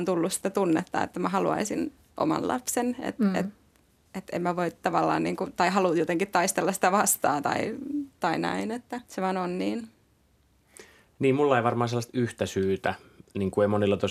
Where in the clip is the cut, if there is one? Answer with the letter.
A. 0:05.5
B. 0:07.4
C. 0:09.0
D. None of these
C